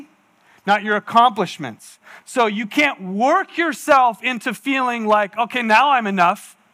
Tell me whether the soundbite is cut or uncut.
uncut